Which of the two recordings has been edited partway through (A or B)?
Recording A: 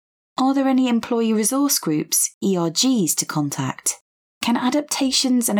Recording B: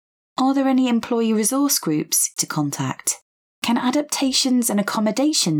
B